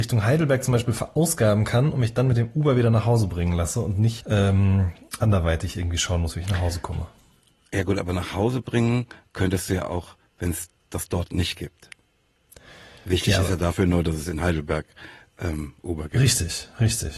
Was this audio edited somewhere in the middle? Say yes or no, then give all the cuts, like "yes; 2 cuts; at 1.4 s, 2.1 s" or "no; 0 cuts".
yes; 1 cut; at 4.2 s